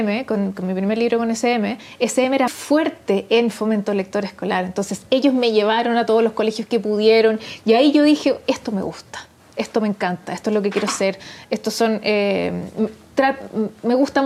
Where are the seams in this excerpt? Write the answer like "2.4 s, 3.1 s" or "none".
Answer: 2.5 s